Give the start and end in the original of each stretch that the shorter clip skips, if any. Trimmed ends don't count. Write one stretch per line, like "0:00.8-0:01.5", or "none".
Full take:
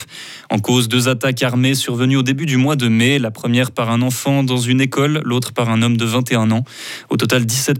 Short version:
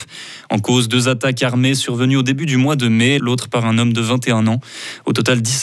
0:03.2-0:05.2